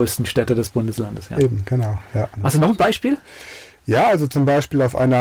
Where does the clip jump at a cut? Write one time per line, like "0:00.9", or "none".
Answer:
0:02.3